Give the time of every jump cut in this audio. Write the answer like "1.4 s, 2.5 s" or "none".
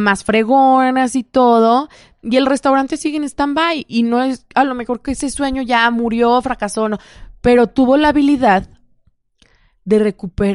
none

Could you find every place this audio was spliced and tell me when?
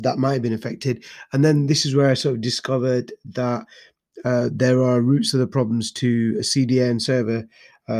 none

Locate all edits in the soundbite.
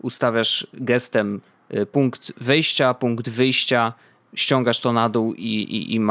none

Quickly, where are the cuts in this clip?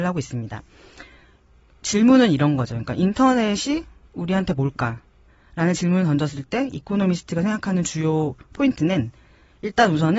none

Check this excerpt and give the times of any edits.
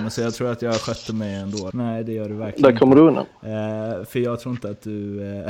1.7 s

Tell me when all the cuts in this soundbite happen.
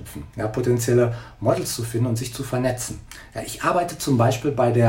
none

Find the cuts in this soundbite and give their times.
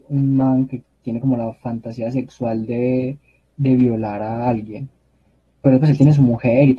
none

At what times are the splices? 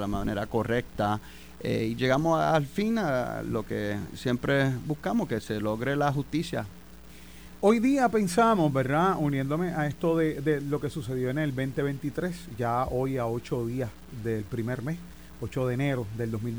none

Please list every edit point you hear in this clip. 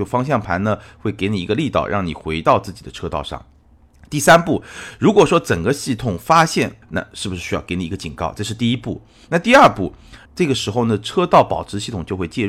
6.8 s, 10.3 s

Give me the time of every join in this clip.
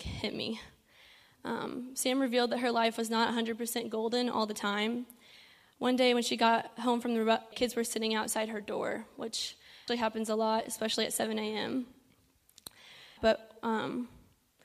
7.5 s, 9.9 s, 13.2 s

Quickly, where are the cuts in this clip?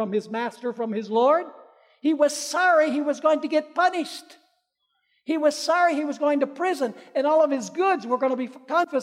none

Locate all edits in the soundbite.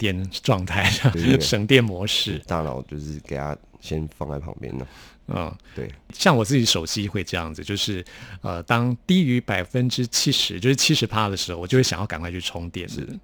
1.1 s

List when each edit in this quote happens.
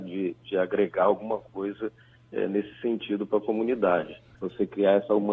4.3 s

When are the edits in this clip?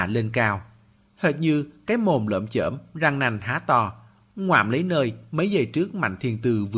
1.0 s

